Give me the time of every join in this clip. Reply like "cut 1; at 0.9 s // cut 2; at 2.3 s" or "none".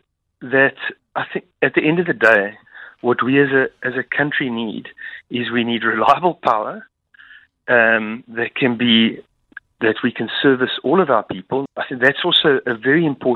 cut 1; at 11.7 s